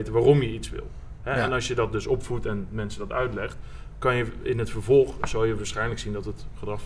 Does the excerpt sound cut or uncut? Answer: uncut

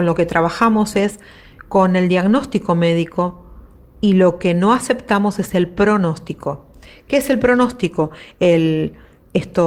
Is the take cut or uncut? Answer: uncut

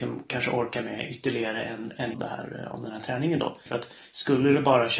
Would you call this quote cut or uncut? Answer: cut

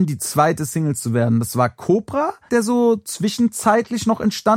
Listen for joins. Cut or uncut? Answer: cut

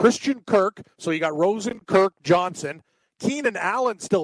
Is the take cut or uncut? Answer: uncut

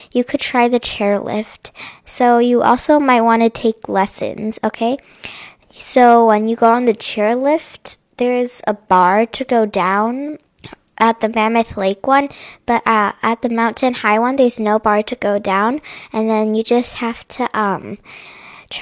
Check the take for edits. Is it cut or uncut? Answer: uncut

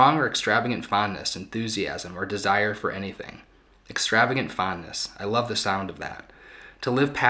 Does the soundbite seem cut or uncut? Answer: uncut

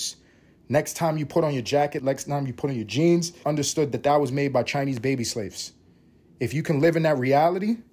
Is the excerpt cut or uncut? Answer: cut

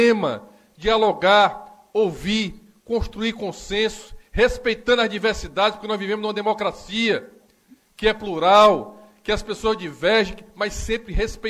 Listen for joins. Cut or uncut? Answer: uncut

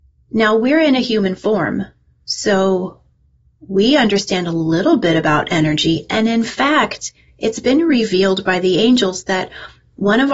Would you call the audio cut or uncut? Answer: uncut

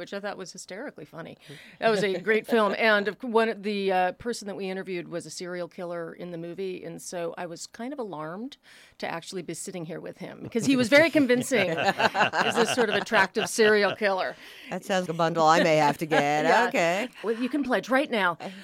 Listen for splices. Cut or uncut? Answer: cut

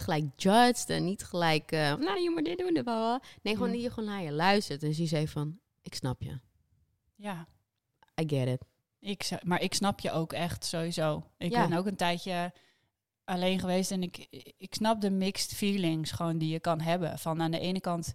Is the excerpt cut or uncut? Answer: cut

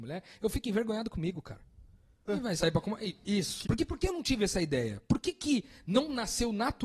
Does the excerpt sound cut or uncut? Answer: cut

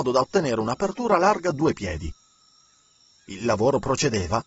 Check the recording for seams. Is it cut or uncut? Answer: uncut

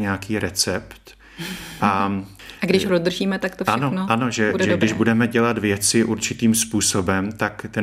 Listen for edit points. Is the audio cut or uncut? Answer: uncut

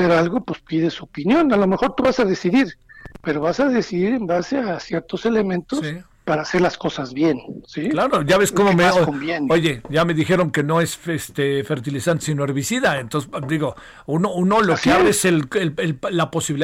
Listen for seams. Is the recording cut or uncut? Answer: uncut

